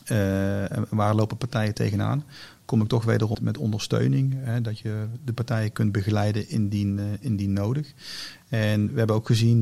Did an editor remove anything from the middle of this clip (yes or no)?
yes